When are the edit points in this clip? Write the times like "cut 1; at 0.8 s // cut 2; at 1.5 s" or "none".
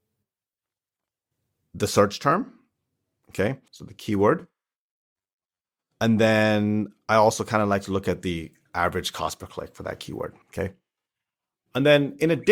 cut 1; at 3.7 s // cut 2; at 10.4 s